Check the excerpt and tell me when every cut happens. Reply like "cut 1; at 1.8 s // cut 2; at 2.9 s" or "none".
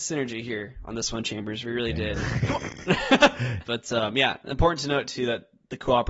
cut 1; at 2.2 s // cut 2; at 3.6 s